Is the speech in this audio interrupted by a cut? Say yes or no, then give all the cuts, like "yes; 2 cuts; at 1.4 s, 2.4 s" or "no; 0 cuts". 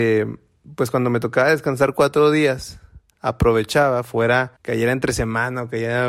yes; 1 cut; at 4.6 s